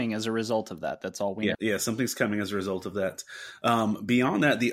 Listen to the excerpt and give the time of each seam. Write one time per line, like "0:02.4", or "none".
0:01.5